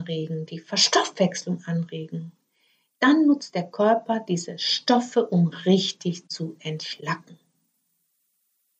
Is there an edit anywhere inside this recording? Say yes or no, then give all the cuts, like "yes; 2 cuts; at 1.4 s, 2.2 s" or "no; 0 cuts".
no; 0 cuts